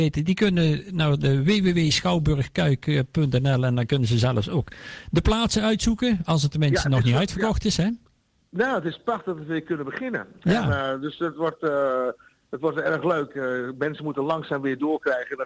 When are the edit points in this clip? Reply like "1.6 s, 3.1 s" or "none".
none